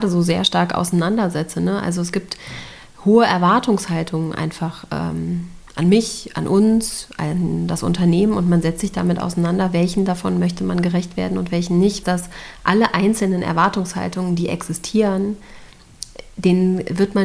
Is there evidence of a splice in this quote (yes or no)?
yes